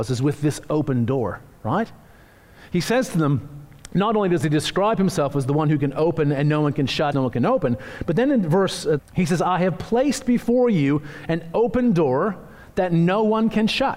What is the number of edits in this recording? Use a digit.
2